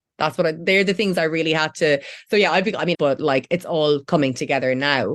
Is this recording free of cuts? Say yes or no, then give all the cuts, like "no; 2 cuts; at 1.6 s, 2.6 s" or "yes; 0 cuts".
no; 1 cut; at 2.9 s